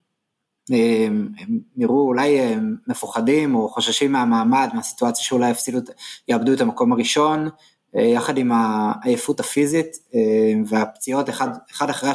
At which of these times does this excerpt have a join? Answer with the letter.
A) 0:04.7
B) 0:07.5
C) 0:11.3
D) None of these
D